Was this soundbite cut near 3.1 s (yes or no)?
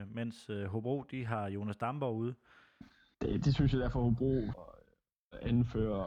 yes